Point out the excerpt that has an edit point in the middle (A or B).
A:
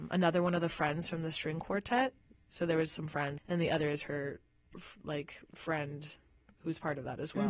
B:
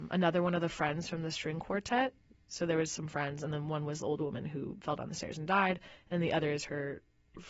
A